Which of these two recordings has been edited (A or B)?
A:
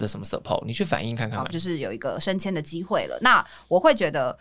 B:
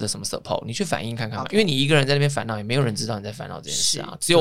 A